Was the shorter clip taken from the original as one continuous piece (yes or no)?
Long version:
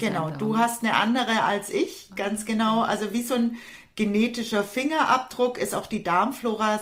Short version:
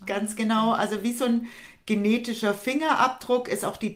yes